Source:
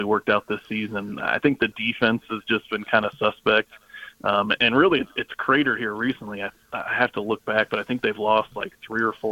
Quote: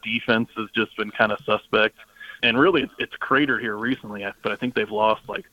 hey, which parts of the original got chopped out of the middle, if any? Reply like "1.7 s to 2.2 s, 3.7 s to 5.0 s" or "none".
4.1 s to 4.6 s, 6.6 s to 7.7 s